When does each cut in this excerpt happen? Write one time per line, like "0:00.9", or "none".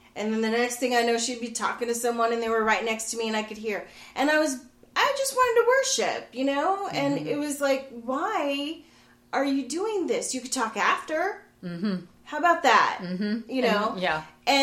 none